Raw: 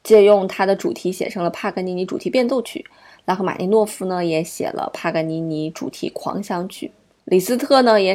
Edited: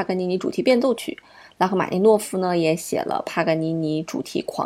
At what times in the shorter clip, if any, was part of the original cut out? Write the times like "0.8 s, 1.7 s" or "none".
none